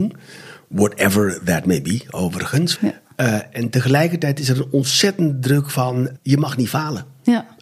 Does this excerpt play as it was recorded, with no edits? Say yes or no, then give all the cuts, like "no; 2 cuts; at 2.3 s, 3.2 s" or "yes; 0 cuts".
no; 2 cuts; at 2.8 s, 6.2 s